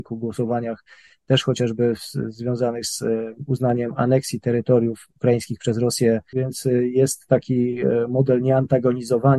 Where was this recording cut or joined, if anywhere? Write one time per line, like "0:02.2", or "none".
0:06.3